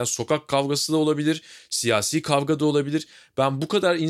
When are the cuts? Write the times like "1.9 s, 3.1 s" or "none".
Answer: 1.6 s